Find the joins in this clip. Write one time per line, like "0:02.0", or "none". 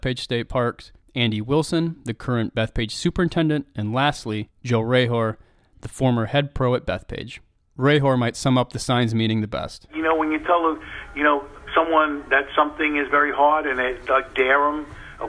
none